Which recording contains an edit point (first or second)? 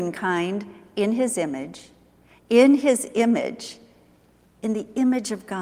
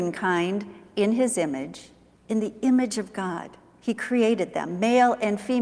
second